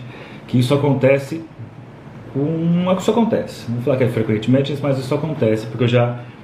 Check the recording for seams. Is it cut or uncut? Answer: uncut